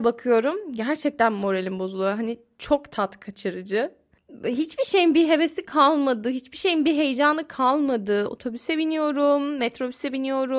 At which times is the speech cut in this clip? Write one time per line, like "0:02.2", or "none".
none